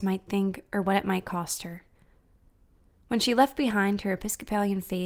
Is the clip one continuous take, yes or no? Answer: yes